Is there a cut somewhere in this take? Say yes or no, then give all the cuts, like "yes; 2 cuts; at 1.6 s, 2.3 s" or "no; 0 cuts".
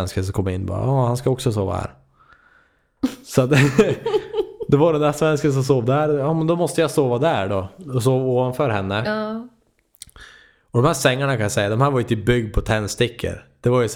no; 0 cuts